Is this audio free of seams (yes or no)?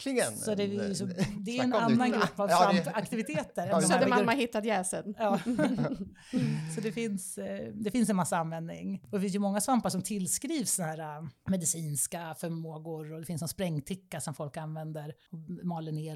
yes